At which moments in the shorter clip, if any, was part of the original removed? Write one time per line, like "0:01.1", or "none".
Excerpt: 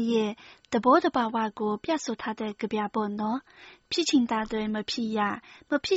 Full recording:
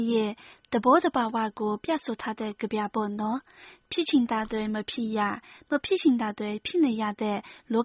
none